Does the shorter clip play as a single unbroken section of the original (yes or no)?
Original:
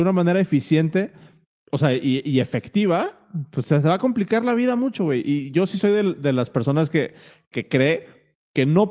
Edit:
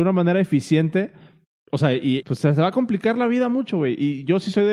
no